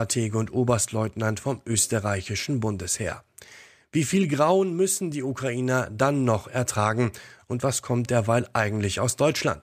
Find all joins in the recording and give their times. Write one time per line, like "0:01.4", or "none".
none